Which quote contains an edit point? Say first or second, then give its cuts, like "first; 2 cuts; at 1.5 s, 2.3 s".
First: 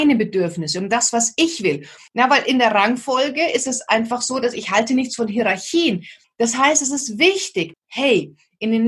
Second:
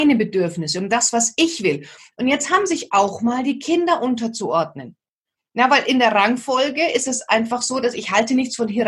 first; 3 cuts; at 2.1 s, 6.2 s, 7.7 s